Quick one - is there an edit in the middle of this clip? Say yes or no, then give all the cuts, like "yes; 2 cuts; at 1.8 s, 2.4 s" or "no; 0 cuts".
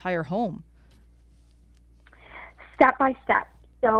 no; 0 cuts